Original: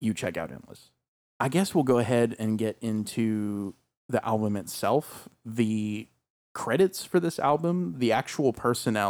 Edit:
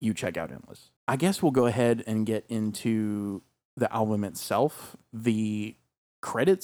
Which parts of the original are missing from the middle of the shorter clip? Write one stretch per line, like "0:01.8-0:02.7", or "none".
0:01.0-0:01.3